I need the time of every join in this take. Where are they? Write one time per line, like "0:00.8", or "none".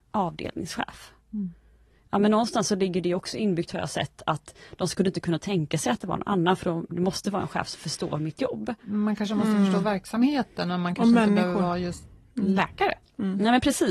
none